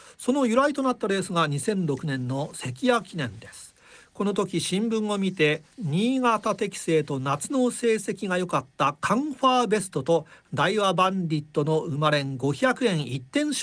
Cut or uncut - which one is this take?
cut